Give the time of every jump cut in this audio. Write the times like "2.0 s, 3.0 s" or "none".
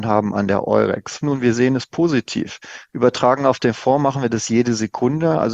1.2 s, 2.9 s

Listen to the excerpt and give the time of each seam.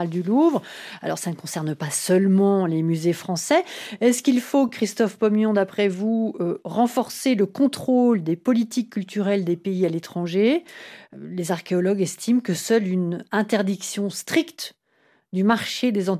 none

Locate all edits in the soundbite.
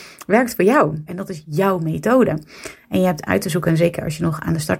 1.1 s

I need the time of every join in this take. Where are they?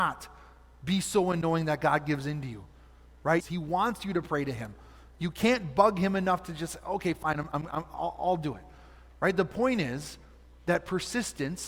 3.4 s

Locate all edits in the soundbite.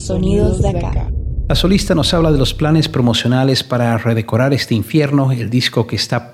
none

